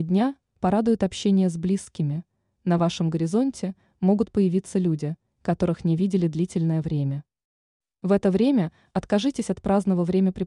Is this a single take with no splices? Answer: yes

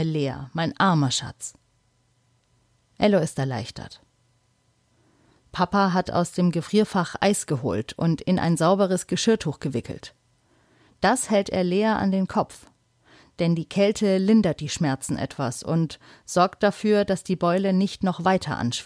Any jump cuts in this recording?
no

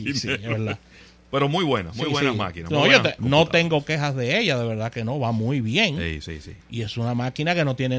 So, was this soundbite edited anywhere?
yes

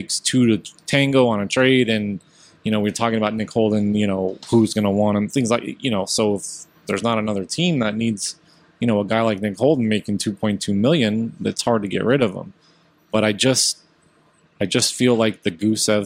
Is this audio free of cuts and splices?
yes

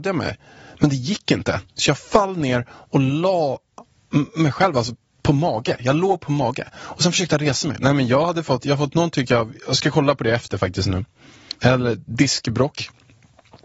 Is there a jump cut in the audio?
yes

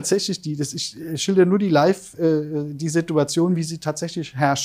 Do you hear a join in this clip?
no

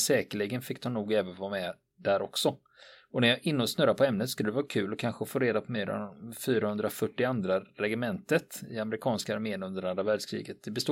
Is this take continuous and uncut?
yes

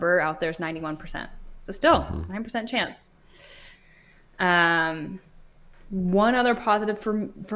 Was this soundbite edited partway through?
no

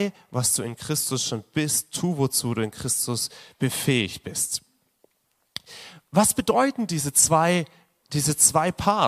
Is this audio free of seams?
yes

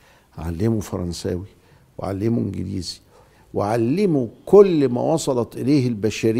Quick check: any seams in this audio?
no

